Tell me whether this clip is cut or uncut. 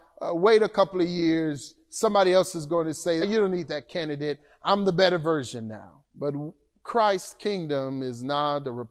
cut